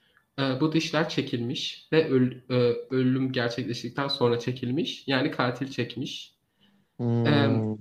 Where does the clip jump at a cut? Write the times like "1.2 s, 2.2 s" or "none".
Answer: none